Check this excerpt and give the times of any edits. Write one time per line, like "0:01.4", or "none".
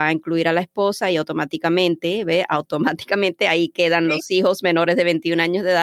none